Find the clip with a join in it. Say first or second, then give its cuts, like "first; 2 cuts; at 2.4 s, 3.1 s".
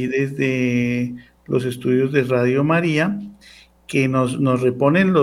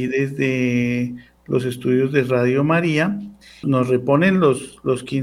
second; 1 cut; at 3.6 s